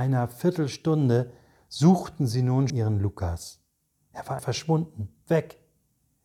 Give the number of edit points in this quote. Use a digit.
2